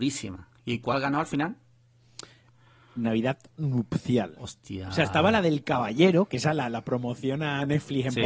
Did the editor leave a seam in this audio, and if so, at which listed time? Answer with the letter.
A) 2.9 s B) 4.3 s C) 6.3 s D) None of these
D